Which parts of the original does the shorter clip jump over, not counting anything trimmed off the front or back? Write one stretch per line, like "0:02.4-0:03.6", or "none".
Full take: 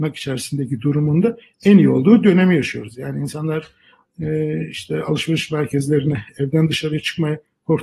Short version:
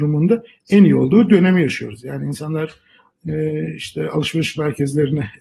none